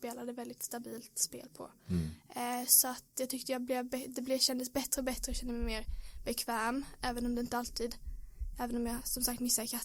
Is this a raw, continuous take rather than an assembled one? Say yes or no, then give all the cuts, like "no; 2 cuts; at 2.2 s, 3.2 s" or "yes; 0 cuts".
yes; 0 cuts